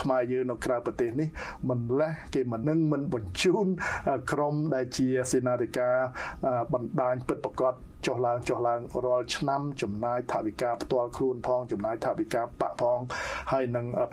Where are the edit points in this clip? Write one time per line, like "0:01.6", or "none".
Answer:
0:02.6